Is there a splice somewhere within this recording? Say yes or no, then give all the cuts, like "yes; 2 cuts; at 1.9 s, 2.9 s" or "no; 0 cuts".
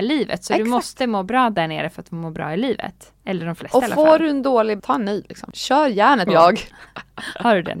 yes; 3 cuts; at 3.2 s, 4.8 s, 6.3 s